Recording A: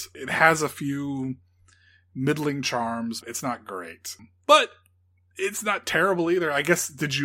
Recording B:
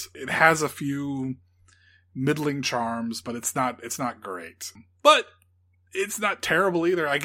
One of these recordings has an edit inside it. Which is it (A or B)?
A